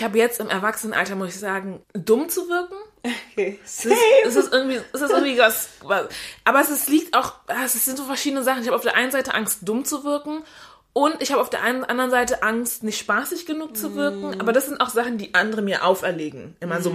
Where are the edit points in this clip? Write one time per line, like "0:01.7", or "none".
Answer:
0:01.8